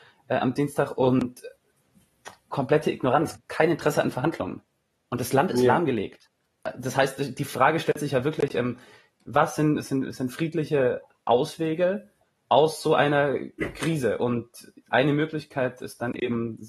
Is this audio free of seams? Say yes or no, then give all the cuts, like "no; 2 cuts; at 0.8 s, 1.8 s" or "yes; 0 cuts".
yes; 0 cuts